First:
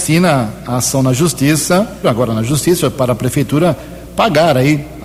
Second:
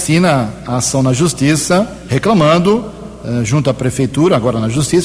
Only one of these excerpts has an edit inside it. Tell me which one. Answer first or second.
first